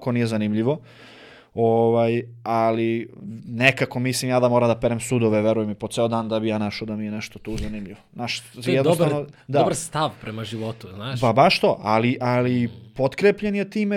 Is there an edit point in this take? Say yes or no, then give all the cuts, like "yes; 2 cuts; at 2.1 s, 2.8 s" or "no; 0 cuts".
no; 0 cuts